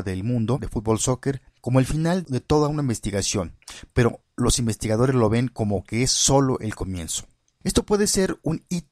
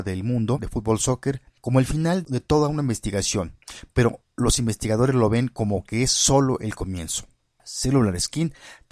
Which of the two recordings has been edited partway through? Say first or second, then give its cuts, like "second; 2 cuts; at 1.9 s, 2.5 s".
second; 1 cut; at 7.4 s